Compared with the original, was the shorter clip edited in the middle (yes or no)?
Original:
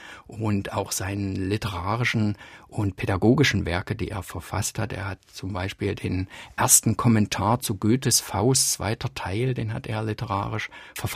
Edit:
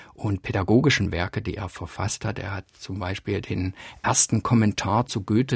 no